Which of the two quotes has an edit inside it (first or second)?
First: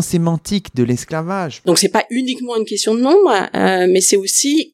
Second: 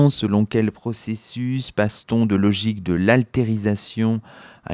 first